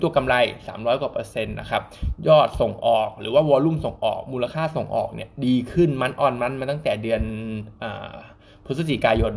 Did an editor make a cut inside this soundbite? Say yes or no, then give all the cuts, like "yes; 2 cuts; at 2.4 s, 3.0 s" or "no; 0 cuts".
no; 0 cuts